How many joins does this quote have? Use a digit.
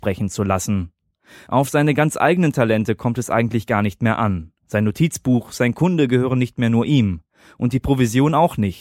0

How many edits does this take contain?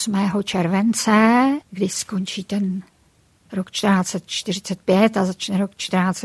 1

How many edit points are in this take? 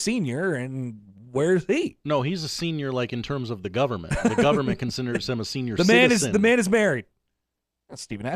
0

